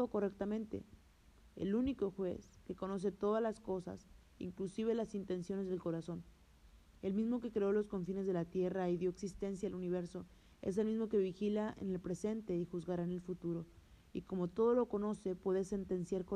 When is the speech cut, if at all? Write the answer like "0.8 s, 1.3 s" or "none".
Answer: 1.4 s